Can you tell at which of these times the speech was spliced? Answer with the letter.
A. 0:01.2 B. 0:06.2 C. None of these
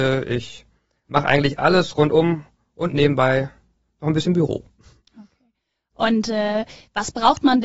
C